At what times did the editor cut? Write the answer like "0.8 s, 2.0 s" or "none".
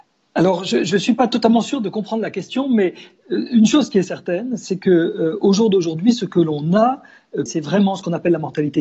7.5 s